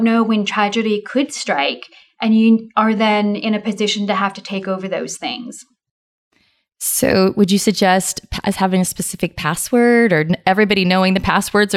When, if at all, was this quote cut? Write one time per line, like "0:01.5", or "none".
none